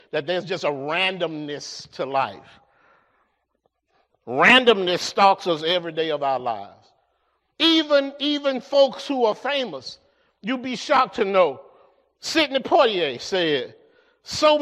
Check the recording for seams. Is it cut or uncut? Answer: cut